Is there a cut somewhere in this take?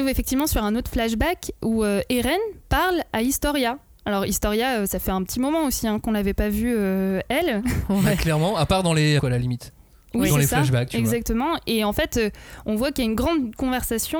yes; 1 cut; at 9.2 s

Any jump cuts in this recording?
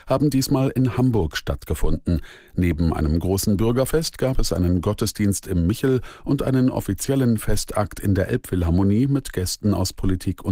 no; 0 cuts

